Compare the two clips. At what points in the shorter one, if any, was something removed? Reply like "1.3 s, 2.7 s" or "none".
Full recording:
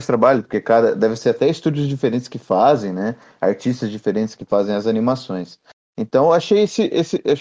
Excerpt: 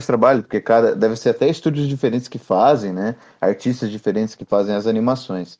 none